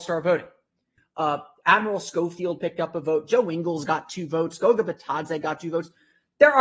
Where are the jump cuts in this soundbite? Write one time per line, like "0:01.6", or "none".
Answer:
0:01.0